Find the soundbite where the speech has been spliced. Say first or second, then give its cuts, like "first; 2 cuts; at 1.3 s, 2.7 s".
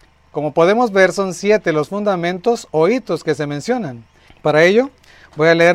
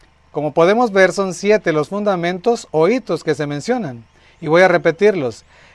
first; 1 cut; at 4.3 s